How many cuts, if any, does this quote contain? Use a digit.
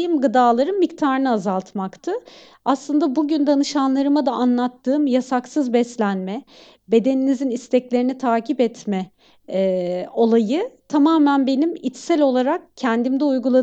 0